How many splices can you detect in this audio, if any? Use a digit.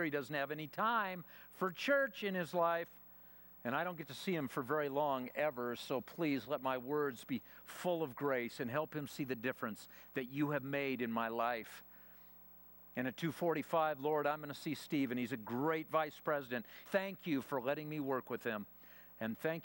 1